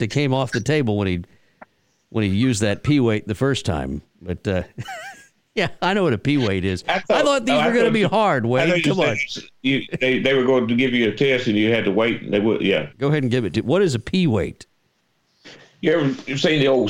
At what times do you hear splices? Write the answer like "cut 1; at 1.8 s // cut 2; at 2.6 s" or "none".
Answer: cut 1; at 12.9 s